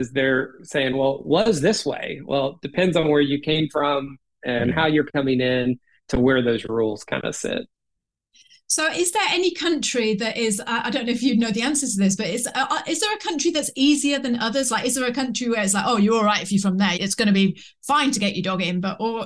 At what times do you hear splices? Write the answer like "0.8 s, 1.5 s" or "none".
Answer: 17.0 s